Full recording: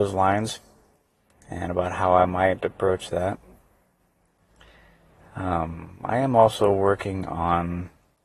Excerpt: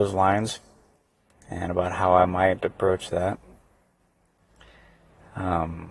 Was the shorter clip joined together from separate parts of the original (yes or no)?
no